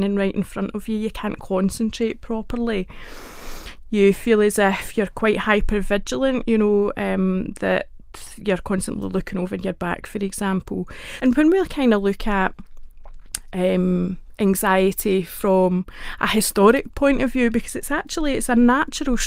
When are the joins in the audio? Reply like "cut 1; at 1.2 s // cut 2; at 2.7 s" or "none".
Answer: cut 1; at 11.2 s